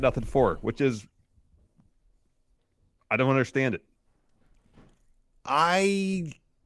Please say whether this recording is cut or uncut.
uncut